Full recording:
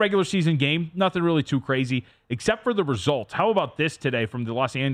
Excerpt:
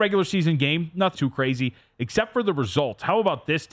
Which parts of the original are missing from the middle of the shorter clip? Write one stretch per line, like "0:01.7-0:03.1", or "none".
0:01.1-0:01.4